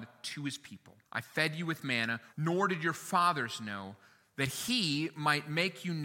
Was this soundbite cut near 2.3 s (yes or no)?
yes